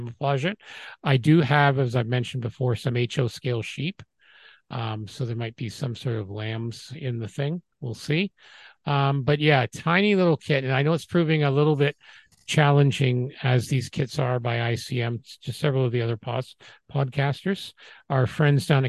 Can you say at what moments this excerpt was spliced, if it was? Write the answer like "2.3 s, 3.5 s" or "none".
none